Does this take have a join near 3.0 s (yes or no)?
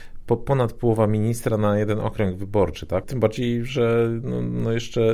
yes